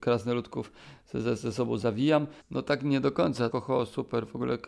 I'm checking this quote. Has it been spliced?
yes; 2 cuts; at 2.4 s, 3.5 s

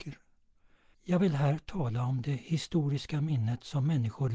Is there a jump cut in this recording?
yes; 1 cut; at 0.9 s

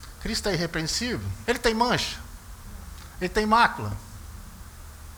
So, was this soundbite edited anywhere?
yes; 1 cut; at 1.5 s

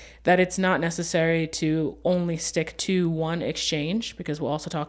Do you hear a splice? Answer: no; 0 cuts

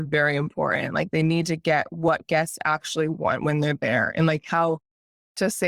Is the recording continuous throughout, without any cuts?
yes; 0 cuts

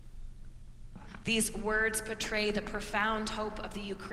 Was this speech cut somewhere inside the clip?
yes; 1 cut; at 1.2 s

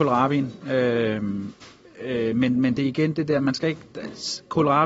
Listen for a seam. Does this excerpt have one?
no; 0 cuts

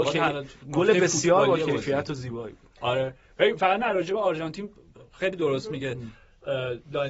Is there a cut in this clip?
no; 0 cuts

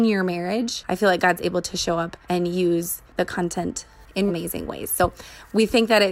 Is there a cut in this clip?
yes; 2 cuts; at 2.2 s, 4.3 s

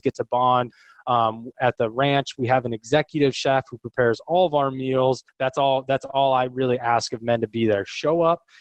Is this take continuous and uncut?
no; 1 cut; at 5.3 s

